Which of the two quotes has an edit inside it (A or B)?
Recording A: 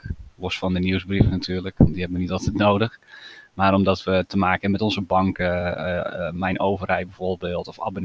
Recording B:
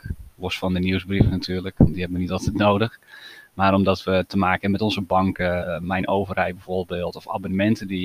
B